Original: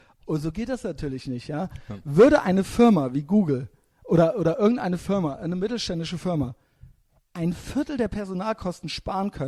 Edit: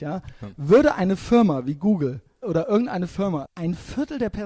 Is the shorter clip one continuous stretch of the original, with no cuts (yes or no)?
no